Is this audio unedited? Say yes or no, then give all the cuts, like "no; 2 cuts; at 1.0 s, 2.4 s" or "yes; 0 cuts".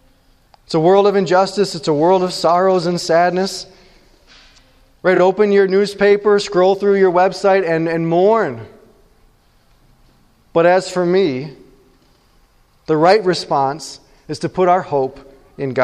yes; 0 cuts